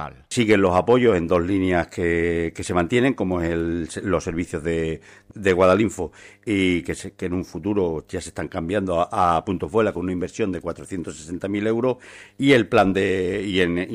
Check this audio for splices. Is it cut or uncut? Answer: uncut